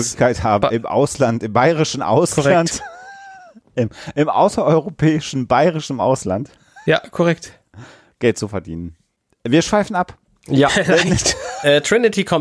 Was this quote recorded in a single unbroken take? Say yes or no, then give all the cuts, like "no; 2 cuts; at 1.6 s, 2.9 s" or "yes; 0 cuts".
yes; 0 cuts